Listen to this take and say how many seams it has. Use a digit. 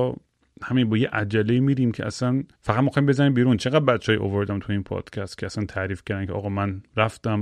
1